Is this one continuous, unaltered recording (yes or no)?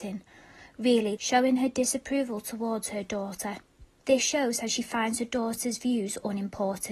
no